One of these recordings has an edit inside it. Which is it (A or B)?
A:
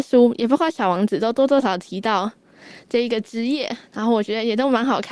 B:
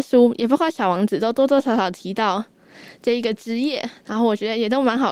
A